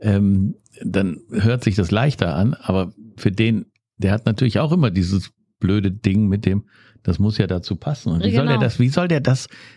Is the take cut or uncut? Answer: uncut